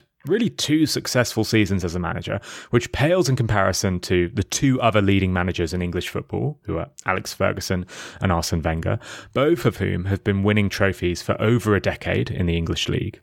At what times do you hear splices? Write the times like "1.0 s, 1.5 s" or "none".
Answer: none